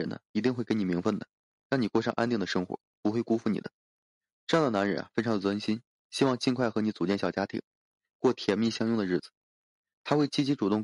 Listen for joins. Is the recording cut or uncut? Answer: cut